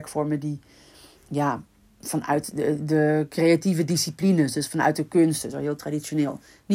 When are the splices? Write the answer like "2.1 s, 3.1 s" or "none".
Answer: none

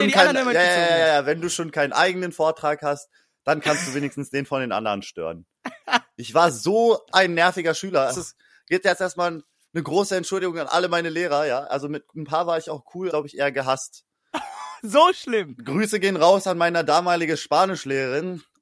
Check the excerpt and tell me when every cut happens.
8.1 s, 13.1 s

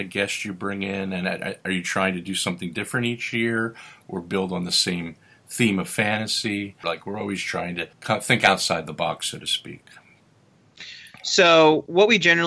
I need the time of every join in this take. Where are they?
6.8 s, 7.9 s

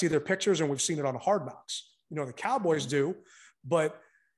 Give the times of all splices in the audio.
none

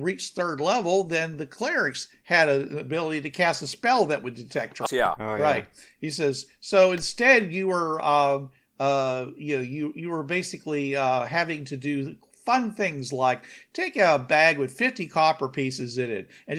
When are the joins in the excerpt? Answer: 4.9 s

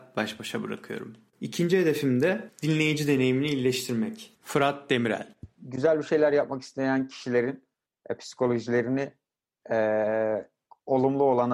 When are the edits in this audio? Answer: 1.3 s, 4.3 s

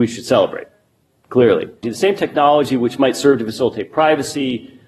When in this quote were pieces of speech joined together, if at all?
1.8 s

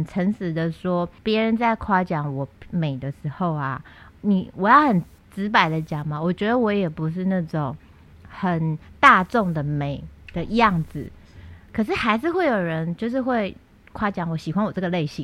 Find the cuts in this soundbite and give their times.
1.2 s

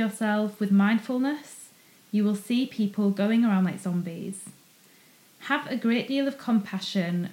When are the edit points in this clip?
none

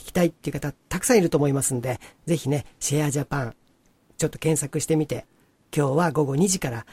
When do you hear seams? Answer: none

